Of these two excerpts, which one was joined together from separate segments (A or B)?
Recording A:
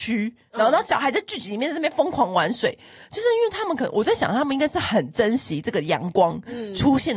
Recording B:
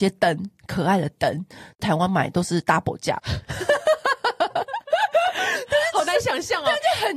B